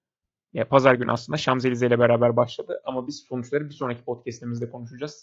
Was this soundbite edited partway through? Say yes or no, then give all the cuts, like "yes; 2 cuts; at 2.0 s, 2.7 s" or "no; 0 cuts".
no; 0 cuts